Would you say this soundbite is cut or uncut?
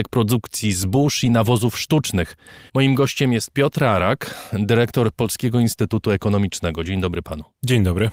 cut